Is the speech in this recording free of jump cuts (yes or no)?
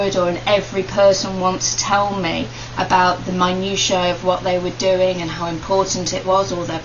yes